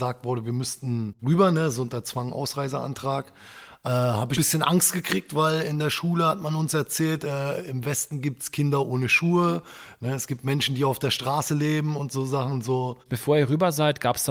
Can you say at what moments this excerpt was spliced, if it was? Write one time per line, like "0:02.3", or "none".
0:04.3

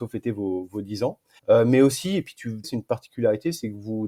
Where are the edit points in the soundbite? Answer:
0:01.4
0:02.6

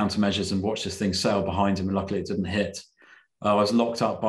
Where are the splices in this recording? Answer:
none

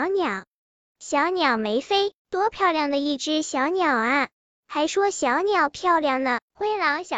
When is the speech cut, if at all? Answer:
0:02.2
0:04.3

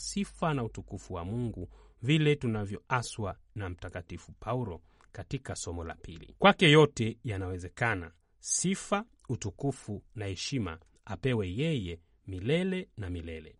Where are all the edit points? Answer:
none

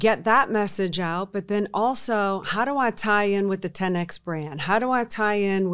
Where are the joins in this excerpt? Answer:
none

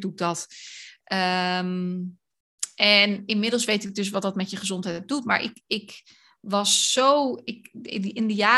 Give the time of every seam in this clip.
0:01.0

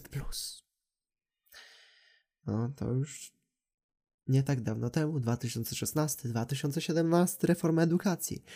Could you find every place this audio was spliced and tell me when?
none

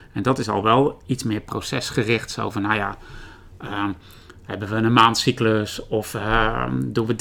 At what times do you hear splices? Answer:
none

